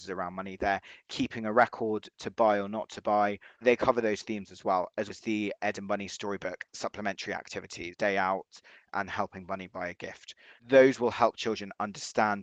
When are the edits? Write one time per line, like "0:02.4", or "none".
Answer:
0:03.6
0:05.1
0:07.9